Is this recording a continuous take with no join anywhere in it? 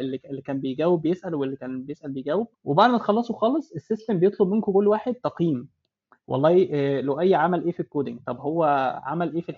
no; 1 cut; at 2.5 s

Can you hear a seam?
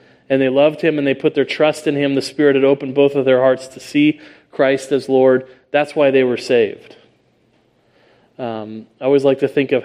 no; 0 cuts

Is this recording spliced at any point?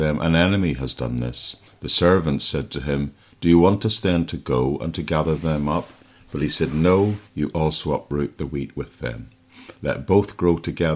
yes; 1 cut; at 7.2 s

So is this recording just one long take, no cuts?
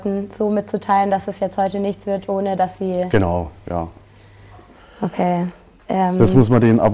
yes; 0 cuts

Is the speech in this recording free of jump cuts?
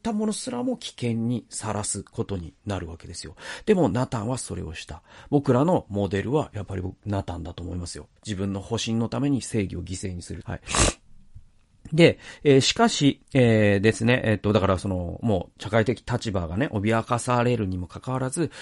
no; 2 cuts; at 8.2 s, 10.4 s

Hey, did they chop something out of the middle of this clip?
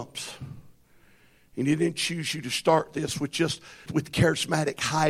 yes; 1 cut; at 3.9 s

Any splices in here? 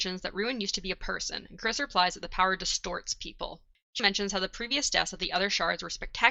yes; 1 cut; at 4.0 s

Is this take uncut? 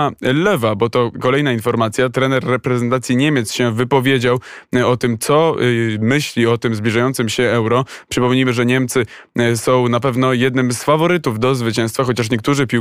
yes; 0 cuts

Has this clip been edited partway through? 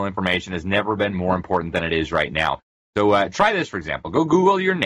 no; 0 cuts

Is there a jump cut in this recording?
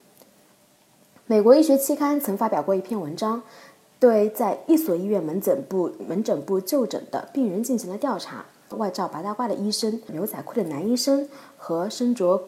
yes; 2 cuts; at 8.7 s, 10.1 s

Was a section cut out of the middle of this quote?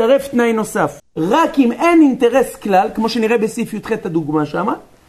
yes; 1 cut; at 1.0 s

